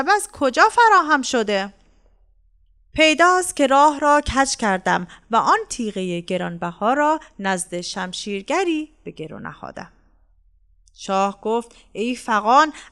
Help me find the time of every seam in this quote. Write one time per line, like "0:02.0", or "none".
0:02.8